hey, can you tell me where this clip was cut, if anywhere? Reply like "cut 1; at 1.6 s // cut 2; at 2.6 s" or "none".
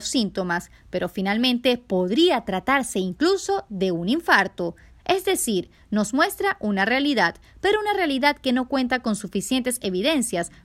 cut 1; at 4.9 s